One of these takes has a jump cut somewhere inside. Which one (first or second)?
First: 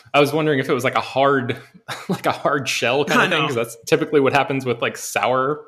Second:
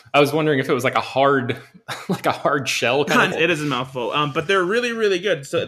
second